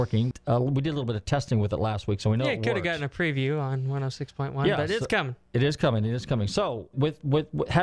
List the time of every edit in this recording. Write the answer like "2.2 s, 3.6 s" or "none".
6.9 s